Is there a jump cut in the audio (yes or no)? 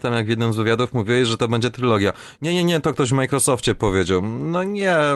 no